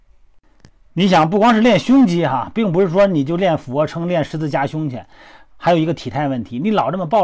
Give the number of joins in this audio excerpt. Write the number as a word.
zero